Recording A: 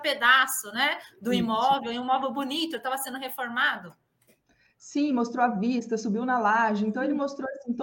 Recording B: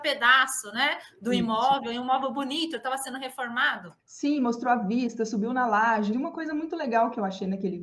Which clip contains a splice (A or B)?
B